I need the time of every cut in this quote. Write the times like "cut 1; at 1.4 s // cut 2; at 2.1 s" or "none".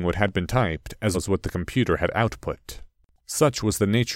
cut 1; at 1.1 s // cut 2; at 3.2 s